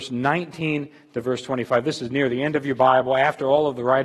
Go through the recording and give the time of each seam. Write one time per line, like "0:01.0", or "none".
none